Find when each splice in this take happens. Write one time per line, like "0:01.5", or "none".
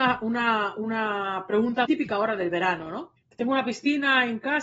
0:01.9
0:03.2